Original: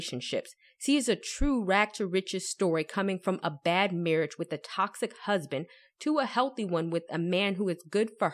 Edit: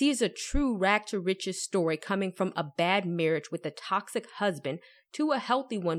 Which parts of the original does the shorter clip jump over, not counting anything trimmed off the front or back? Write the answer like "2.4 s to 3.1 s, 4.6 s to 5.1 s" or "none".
none